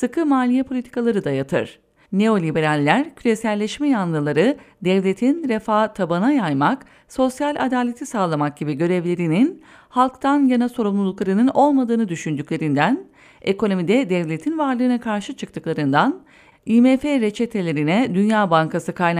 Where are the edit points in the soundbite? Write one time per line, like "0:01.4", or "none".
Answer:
0:02.0